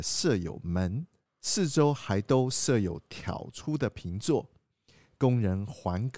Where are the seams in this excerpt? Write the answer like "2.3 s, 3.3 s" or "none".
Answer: none